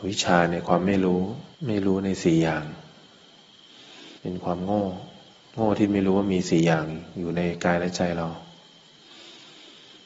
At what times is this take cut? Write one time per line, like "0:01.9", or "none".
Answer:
0:01.5
0:04.2